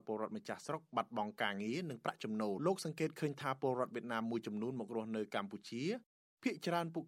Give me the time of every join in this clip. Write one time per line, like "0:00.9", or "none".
0:02.6